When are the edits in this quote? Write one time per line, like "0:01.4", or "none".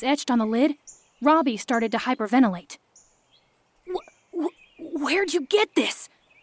none